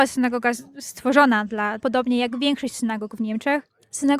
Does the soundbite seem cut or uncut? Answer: cut